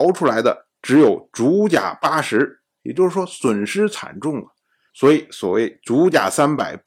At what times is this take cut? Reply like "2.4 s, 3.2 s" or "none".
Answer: 2.7 s, 4.9 s